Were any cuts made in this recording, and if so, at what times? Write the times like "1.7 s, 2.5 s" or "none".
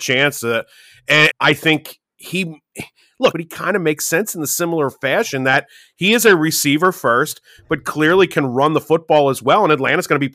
1.3 s, 3.3 s